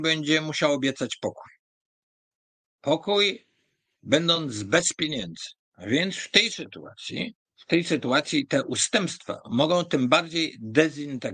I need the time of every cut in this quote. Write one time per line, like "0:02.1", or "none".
0:05.7
0:07.4